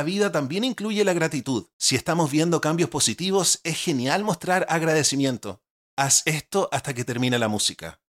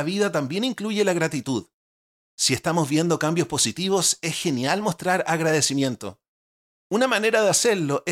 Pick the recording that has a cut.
first; 2 cuts; at 1.7 s, 5.8 s

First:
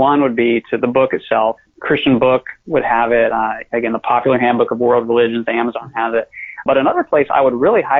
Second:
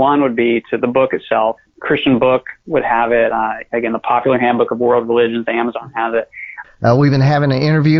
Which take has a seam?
second; 1 cut; at 6.6 s

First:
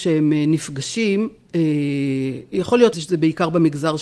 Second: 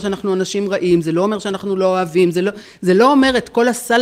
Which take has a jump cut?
first; 1 cut; at 2.9 s

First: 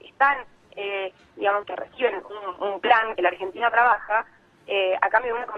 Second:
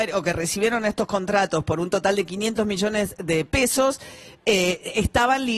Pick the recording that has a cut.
first; 2 cuts; at 1.6 s, 3.2 s

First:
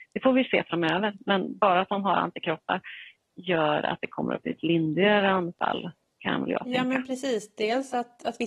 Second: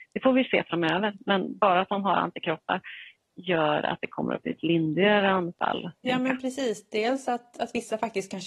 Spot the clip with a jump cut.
second; 1 cut; at 6.1 s

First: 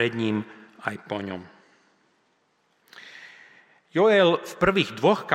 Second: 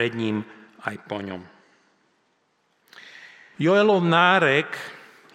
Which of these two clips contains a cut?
second; 1 cut; at 3.5 s

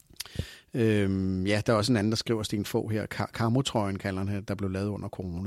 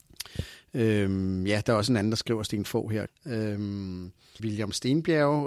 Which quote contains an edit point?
second; 2 cuts; at 3.1 s, 4.4 s

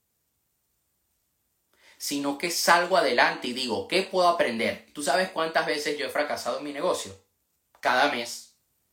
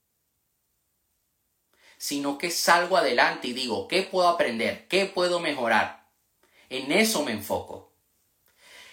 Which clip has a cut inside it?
first; 1 cut; at 4.9 s

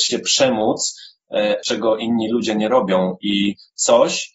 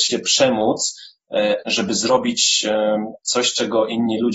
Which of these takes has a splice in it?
first; 1 cut; at 1.6 s

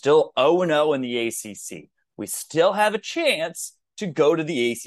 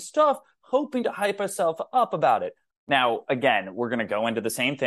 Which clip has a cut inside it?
second; 1 cut; at 2.7 s

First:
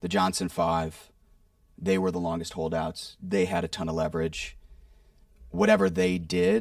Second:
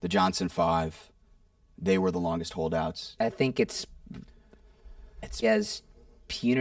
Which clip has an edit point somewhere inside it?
second; 2 cuts; at 3.2 s, 5.4 s

